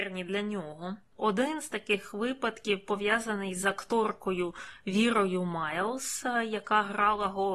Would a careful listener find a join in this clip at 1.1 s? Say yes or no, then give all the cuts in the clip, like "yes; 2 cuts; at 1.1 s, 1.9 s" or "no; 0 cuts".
no; 0 cuts